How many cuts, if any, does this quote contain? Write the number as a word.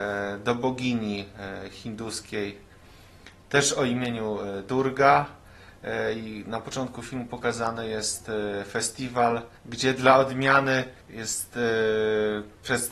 two